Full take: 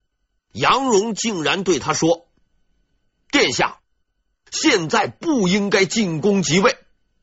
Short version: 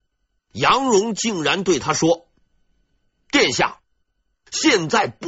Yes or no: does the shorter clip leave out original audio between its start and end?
no